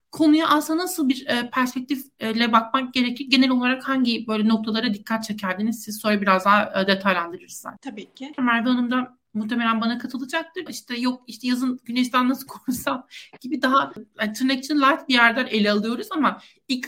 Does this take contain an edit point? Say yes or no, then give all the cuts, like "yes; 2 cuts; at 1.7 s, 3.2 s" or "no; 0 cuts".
yes; 2 cuts; at 8.4 s, 10.7 s